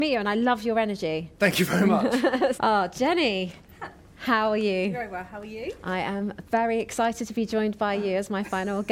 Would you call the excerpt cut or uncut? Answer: cut